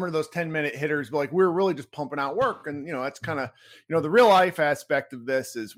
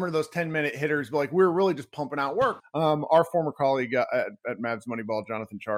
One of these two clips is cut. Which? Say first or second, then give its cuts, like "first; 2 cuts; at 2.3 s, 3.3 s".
second; 1 cut; at 2.6 s